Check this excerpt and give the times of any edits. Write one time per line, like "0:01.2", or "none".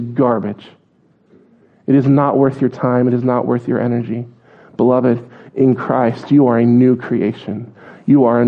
none